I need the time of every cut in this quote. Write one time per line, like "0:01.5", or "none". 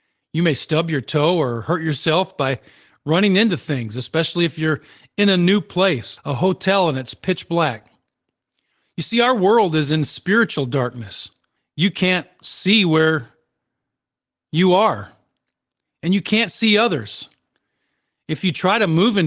0:06.2
0:11.6

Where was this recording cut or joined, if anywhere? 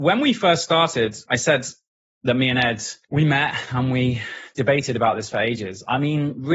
0:01.3
0:03.0

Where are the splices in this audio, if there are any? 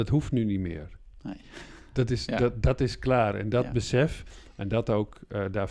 none

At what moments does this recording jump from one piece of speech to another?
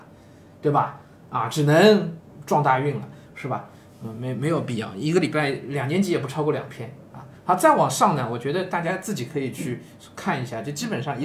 0:03.3

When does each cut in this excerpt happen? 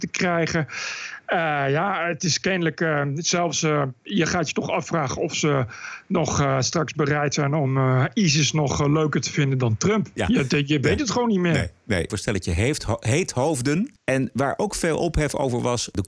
0:12.1
0:14.0

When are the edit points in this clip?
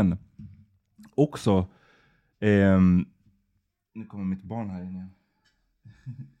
none

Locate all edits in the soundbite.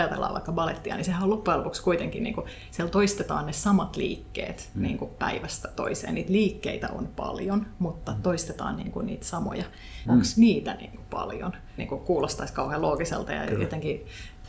0:10.1
0:11.8

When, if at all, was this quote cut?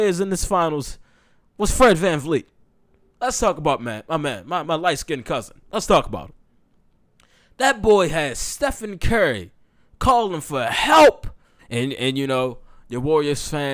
0:04.6
0:11.6

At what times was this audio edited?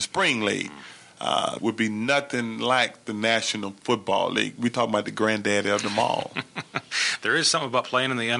0:01.6

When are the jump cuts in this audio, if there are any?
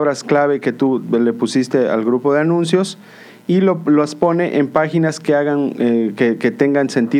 none

